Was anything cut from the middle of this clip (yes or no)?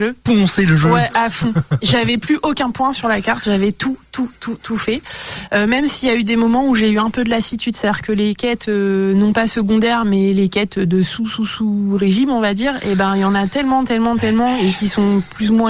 no